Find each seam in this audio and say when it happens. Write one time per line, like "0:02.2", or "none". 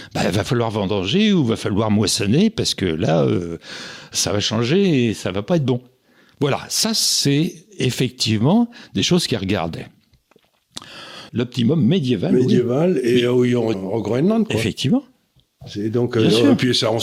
0:11.3
0:13.7